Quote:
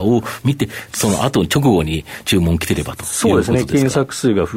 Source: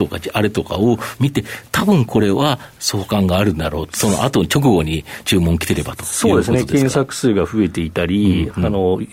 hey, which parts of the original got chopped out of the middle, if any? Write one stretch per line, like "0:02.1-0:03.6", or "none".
0:01.7-0:03.9